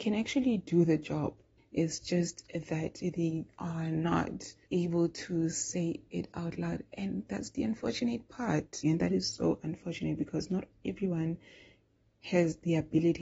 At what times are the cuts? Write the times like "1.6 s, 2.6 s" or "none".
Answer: 1.6 s, 4.6 s, 8.8 s